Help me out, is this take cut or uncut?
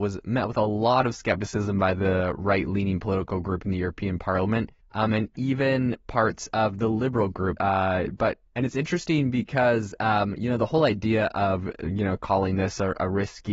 cut